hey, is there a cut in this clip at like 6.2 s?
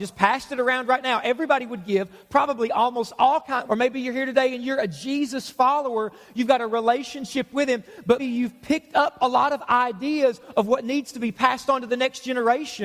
no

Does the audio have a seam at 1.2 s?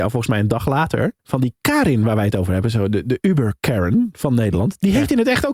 yes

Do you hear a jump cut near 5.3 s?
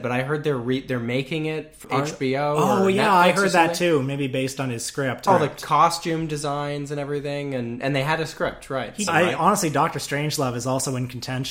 yes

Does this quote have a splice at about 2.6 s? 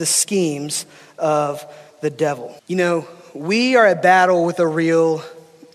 yes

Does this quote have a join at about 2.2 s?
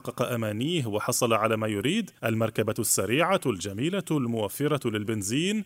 yes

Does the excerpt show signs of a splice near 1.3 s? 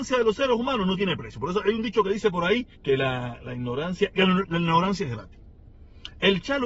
no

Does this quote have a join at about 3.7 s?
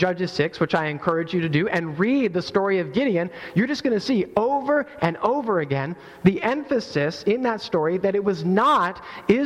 no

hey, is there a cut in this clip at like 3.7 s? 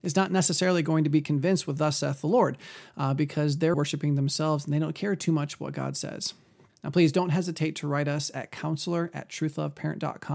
yes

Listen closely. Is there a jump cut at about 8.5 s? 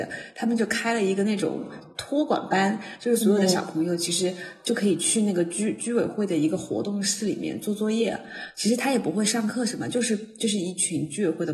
no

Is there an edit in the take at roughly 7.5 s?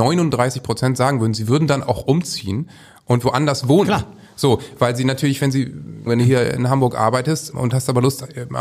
yes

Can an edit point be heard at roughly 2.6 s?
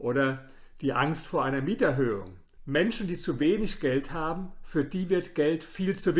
yes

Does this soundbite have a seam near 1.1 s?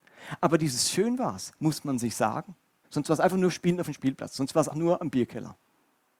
no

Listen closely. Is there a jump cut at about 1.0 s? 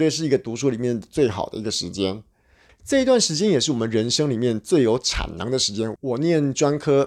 no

